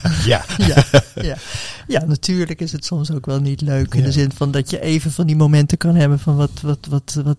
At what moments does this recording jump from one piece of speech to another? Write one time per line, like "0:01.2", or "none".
none